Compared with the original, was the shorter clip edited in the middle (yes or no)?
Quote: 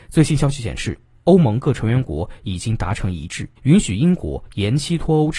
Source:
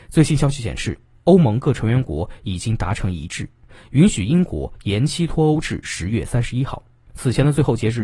yes